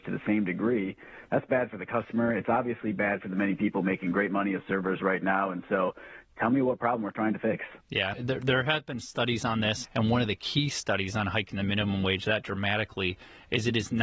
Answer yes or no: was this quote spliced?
yes